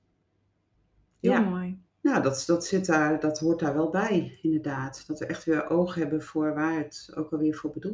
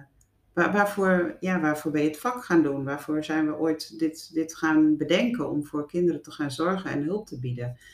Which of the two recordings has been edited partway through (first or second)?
first